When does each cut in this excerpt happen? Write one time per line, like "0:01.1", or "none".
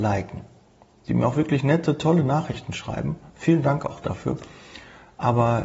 none